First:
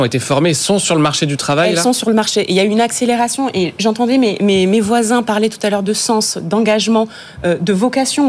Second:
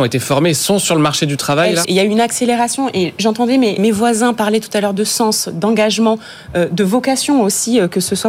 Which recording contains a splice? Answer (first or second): second